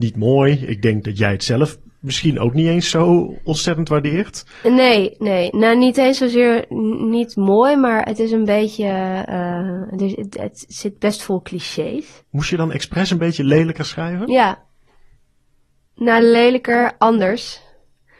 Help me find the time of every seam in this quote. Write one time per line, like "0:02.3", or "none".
none